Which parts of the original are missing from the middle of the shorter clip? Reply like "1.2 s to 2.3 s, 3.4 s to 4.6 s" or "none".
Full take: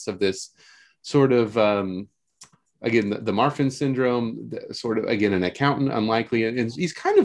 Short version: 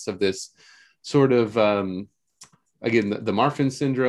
none